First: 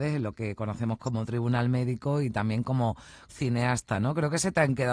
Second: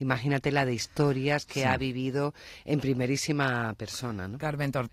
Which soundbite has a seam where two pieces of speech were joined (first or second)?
first